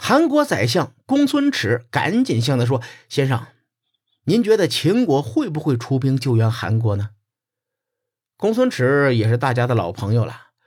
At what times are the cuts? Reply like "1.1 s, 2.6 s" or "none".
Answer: none